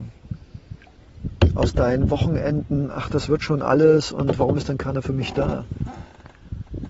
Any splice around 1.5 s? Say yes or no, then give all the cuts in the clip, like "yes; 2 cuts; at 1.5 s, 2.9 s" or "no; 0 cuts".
no; 0 cuts